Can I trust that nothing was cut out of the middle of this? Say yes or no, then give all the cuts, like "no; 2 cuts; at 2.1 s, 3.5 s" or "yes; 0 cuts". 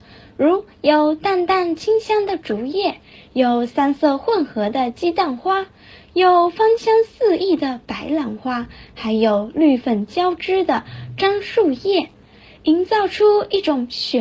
yes; 0 cuts